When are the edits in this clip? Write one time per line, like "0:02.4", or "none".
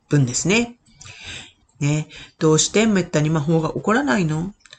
0:01.6